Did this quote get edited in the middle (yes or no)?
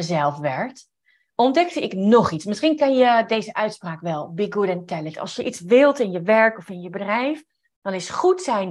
no